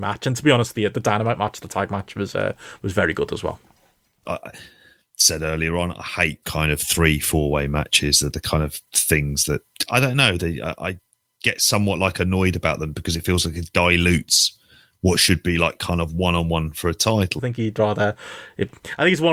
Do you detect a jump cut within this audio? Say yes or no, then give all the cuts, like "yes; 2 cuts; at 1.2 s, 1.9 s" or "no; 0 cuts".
yes; 2 cuts; at 4.2 s, 17.4 s